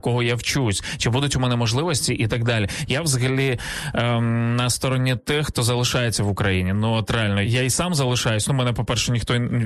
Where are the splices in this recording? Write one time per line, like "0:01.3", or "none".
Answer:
0:07.4